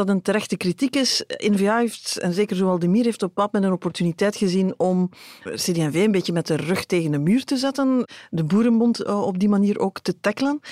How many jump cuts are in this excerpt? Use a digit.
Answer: 1